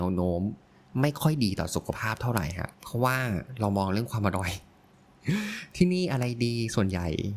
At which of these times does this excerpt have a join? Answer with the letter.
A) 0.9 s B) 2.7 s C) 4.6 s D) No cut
B